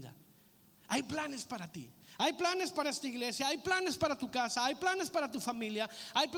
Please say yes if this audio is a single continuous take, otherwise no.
yes